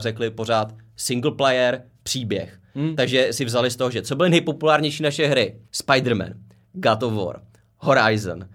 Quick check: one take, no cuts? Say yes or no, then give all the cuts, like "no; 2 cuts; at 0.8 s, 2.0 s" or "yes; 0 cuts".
no; 1 cut; at 5.6 s